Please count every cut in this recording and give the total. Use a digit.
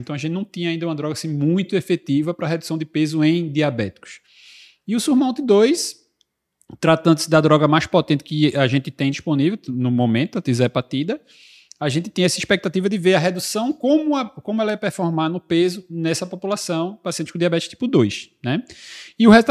0